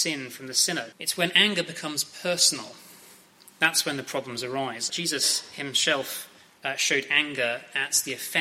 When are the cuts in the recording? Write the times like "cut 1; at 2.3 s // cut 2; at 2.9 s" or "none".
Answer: cut 1; at 0.9 s // cut 2; at 4.9 s